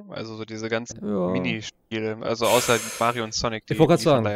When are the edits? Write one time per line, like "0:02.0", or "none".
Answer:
0:00.9